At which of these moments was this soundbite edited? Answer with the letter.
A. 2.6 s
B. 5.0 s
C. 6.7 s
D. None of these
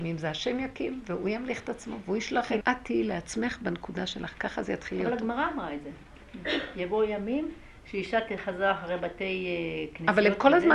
A